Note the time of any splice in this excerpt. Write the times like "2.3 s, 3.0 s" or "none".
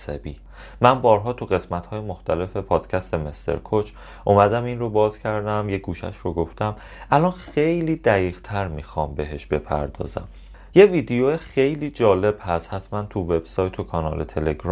10.7 s

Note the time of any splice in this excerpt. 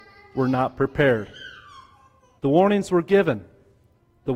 2.4 s

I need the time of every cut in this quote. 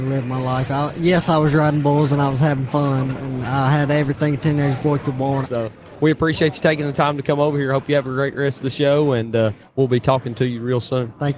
5.4 s

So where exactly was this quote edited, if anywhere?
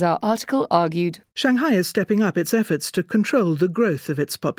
none

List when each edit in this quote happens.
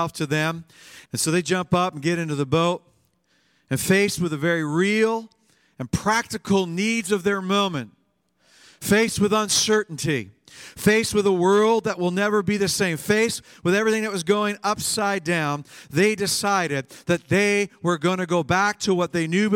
1.1 s

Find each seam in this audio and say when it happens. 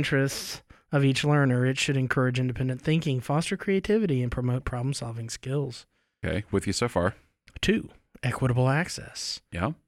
none

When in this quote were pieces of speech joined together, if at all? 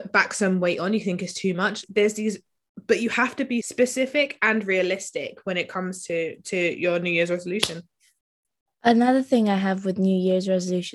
none

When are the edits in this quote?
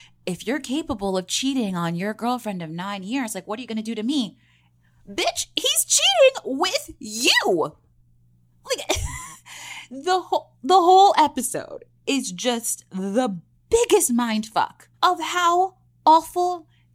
14.9 s

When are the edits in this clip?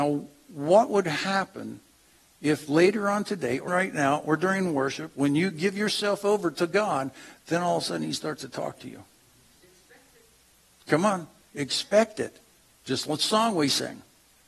3.7 s, 12.7 s

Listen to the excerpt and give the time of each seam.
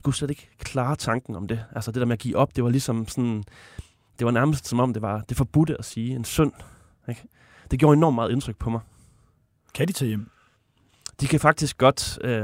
none

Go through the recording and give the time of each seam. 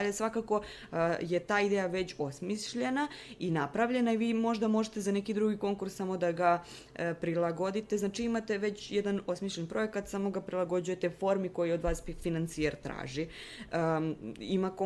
none

